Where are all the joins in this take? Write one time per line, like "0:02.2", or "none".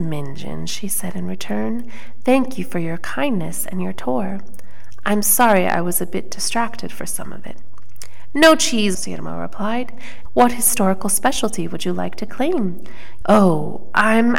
0:08.9
0:10.3
0:13.2